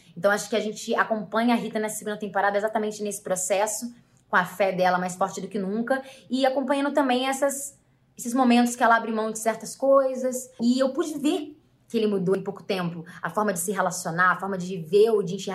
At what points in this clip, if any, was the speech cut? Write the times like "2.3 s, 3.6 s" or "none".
10.6 s